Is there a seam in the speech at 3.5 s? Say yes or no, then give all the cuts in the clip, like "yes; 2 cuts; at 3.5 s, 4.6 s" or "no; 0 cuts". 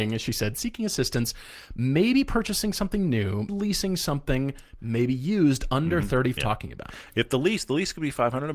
yes; 2 cuts; at 3.5 s, 6.4 s